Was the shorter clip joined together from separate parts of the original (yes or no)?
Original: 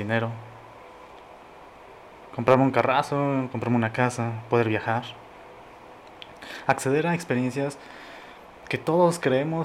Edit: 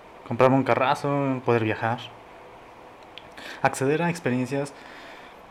yes